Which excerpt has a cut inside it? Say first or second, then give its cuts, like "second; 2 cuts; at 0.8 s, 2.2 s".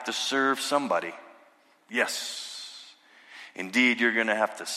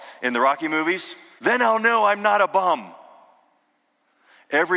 second; 1 cut; at 1.4 s